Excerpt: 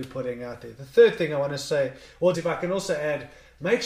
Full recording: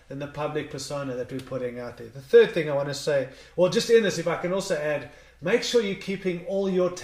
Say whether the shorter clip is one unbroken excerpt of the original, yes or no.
no